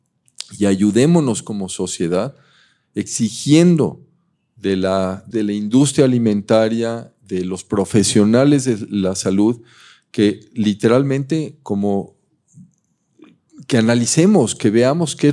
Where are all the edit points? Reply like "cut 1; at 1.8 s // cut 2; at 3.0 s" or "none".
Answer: cut 1; at 5.3 s